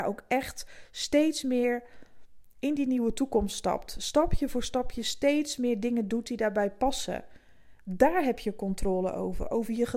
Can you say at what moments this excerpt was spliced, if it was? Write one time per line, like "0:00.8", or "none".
none